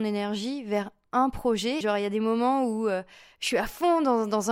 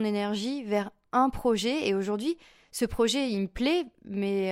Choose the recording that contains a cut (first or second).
first